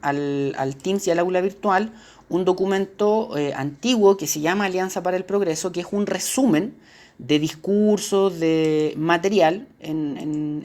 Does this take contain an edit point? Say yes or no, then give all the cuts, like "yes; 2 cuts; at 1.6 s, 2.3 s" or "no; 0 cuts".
no; 0 cuts